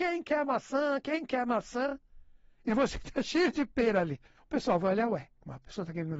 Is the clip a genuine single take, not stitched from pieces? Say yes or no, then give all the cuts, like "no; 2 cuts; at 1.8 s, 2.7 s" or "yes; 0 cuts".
yes; 0 cuts